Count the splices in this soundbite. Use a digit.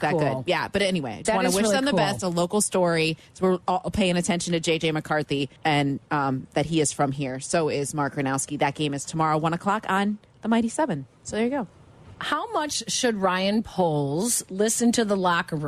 2